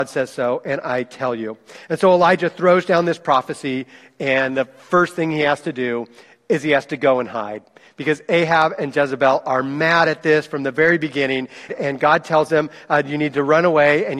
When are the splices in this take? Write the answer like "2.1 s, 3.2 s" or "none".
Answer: 11.7 s